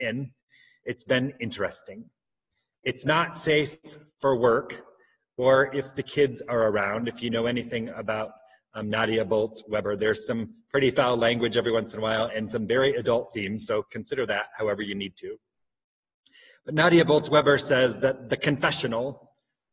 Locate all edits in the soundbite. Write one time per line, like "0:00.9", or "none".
none